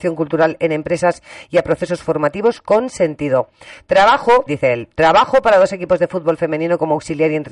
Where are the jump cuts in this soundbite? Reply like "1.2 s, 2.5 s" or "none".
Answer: 4.5 s